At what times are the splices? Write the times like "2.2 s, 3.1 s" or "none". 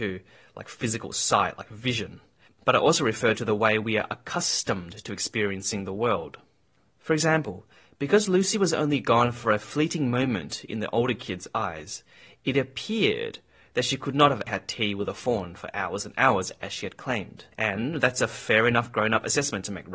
14.5 s, 17.5 s